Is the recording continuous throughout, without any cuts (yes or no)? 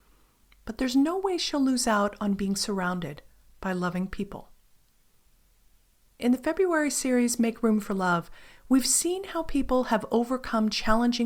yes